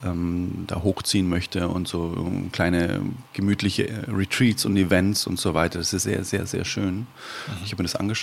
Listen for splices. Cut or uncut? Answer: cut